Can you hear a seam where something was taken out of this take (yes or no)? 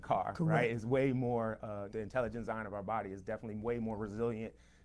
yes